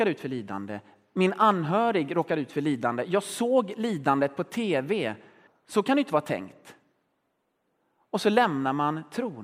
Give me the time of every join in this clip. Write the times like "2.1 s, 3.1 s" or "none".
5.5 s